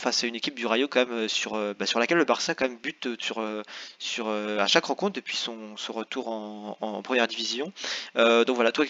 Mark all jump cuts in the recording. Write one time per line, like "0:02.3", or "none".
none